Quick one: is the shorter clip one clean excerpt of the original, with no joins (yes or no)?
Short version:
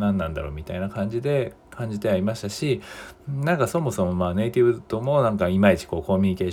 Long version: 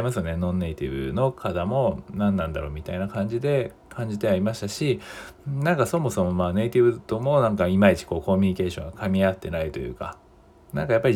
yes